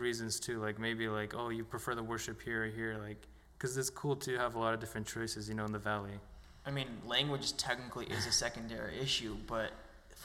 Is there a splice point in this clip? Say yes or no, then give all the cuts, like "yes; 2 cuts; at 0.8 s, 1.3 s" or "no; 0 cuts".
no; 0 cuts